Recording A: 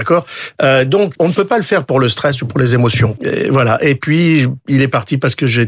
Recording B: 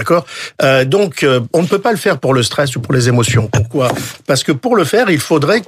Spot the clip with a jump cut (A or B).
A